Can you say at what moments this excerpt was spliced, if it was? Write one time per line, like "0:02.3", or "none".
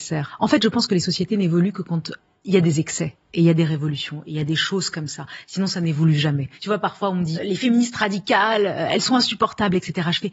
0:07.3